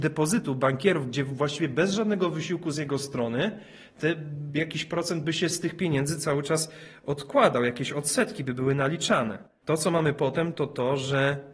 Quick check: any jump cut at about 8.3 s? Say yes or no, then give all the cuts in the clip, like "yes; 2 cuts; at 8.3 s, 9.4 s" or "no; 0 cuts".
no; 1 cut; at 9.6 s